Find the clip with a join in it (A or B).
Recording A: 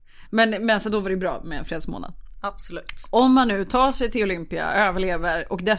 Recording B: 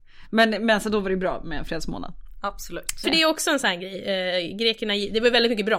B